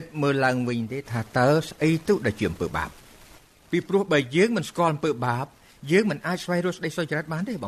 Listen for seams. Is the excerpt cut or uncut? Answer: uncut